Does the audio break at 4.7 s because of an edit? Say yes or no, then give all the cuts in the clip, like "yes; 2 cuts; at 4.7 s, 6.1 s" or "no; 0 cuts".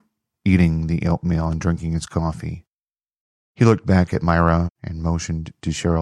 yes; 1 cut; at 4.7 s